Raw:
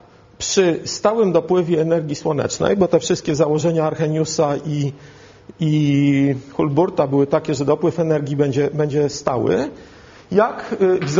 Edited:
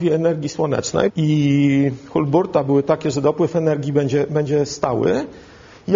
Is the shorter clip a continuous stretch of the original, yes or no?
no